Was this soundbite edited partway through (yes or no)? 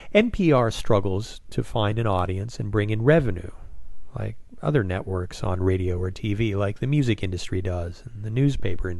no